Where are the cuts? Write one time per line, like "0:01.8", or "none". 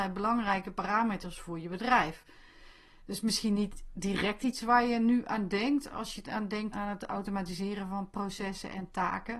0:06.7